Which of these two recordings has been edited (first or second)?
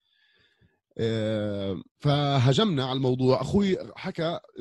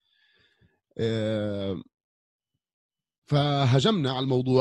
first